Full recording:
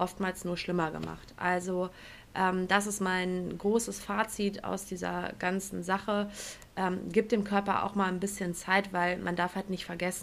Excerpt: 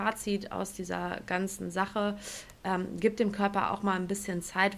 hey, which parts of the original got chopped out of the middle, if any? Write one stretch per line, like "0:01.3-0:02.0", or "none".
none